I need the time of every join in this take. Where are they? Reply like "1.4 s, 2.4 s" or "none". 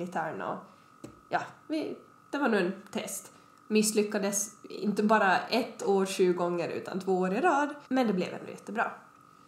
3.5 s, 7.9 s

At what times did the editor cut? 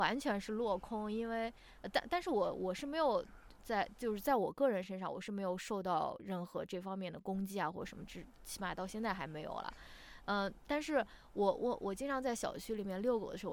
none

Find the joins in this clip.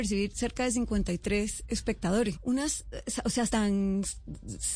2.3 s, 3.5 s

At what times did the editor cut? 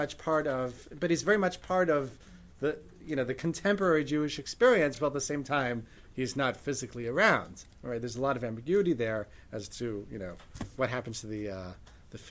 none

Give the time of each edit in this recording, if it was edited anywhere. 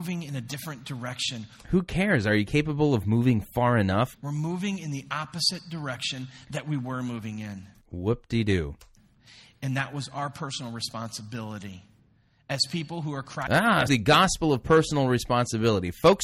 4.1 s, 13.9 s

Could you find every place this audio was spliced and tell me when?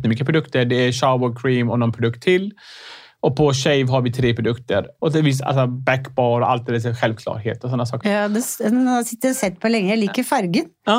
5.0 s, 8.0 s

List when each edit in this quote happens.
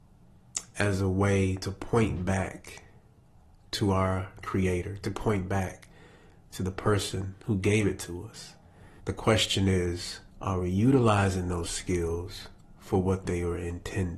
9.0 s, 10.3 s

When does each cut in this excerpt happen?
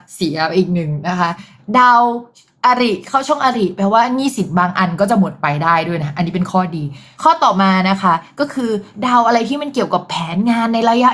none

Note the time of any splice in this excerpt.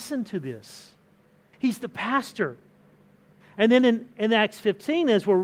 1.5 s, 3.4 s

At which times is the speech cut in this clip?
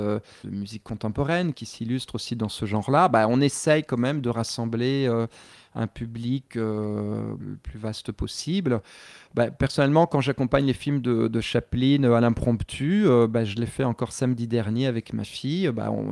none

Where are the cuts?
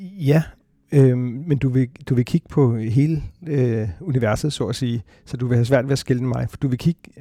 none

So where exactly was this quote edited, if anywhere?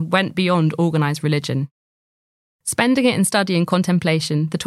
2.4 s

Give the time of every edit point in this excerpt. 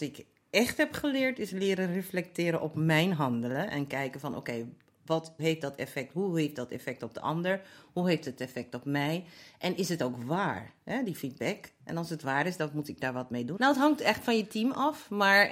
5.4 s, 13.6 s

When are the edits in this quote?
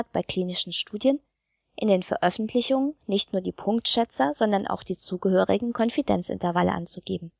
none

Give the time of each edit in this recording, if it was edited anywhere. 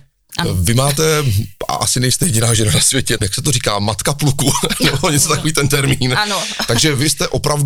3.2 s

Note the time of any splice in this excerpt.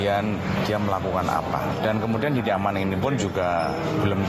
none

